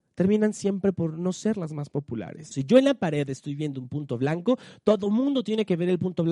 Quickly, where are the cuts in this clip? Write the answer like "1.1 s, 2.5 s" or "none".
2.5 s